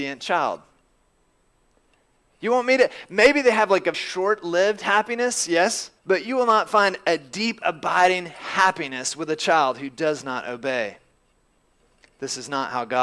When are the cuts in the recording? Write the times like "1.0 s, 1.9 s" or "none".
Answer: 3.9 s, 6.0 s